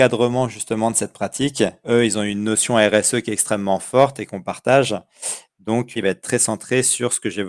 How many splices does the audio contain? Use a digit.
2